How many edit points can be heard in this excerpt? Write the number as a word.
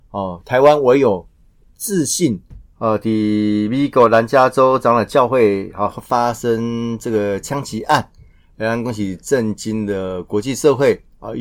one